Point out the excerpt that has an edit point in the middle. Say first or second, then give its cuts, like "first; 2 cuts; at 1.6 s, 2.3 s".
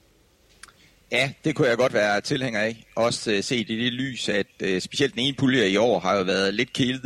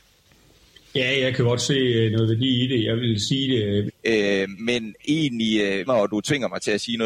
second; 2 cuts; at 3.9 s, 5.9 s